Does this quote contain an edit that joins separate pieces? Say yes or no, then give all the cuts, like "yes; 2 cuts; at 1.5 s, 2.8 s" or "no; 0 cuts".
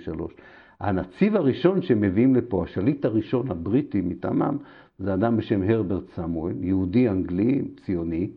no; 0 cuts